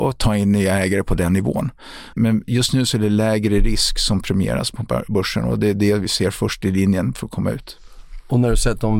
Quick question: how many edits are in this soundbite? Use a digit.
1